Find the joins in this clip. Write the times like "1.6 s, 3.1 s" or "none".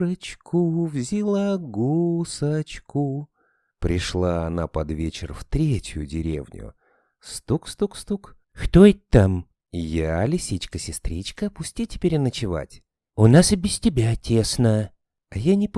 8.4 s